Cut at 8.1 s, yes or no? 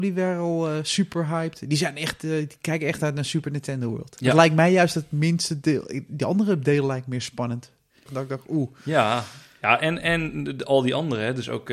yes